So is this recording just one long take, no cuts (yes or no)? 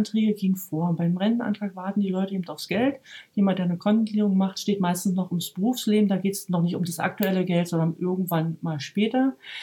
yes